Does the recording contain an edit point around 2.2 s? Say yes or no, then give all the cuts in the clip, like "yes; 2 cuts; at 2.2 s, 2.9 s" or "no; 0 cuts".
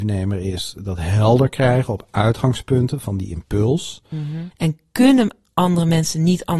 no; 1 cut; at 4.5 s